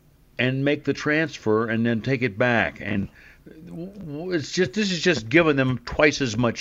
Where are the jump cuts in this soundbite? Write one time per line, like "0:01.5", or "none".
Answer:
none